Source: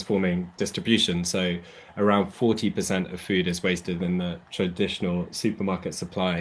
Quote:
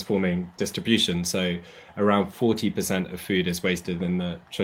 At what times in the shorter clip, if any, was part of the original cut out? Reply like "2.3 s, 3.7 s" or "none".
none